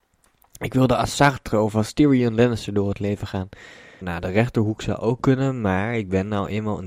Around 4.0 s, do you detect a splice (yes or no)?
yes